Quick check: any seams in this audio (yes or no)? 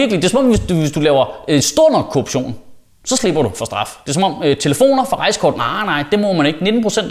no